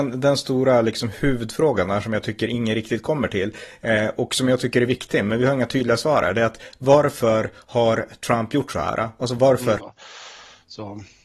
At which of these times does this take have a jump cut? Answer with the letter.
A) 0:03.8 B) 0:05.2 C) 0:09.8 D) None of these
C